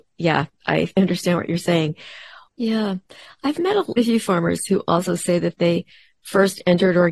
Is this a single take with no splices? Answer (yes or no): no